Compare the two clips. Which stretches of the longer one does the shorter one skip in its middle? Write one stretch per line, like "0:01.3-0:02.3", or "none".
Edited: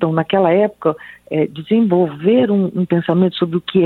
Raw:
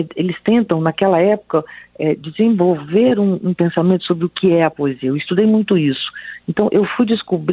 none